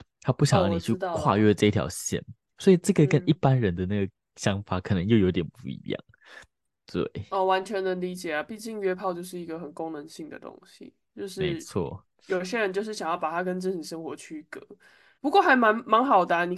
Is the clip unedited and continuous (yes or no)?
no